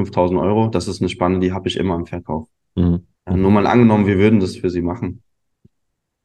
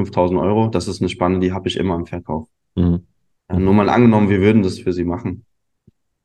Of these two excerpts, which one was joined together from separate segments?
first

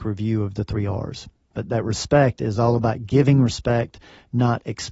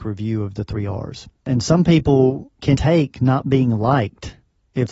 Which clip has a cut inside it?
second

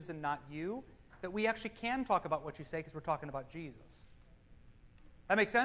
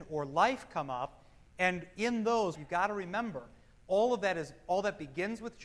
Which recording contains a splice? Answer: second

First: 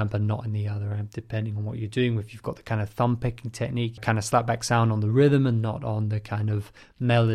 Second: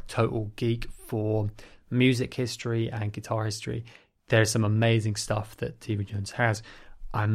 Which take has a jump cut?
first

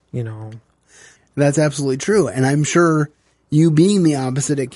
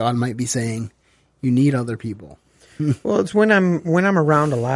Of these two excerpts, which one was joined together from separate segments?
first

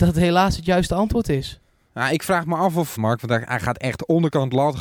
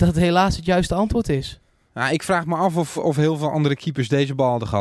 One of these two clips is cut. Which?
first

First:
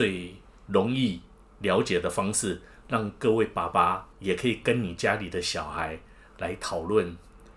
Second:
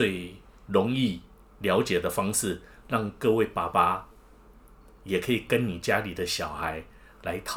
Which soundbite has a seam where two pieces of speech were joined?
first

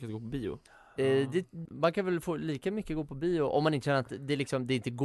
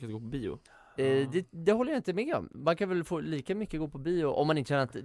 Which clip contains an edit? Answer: first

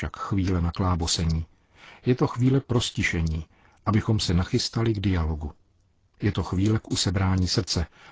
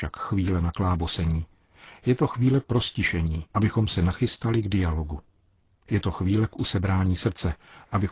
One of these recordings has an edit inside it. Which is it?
second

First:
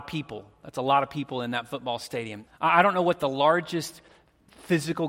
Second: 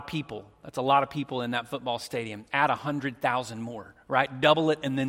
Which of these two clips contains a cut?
first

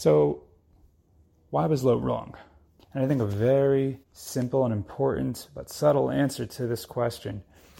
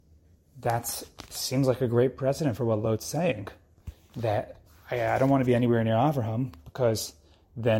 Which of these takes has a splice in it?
first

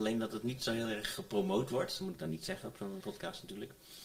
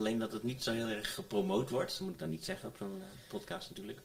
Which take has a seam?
first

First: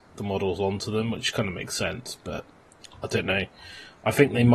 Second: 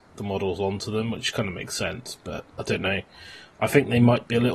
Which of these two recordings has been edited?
second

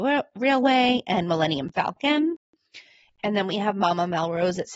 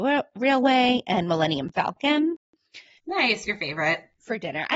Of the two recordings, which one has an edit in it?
second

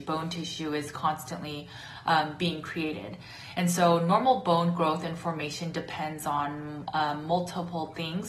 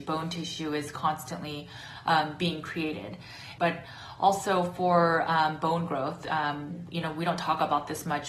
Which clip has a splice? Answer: second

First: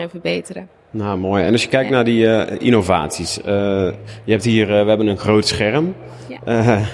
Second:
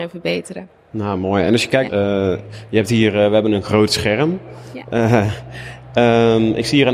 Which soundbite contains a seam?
second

